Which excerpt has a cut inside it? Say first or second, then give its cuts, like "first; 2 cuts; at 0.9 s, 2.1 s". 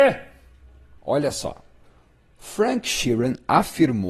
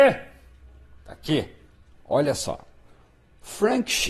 first; 1 cut; at 1.0 s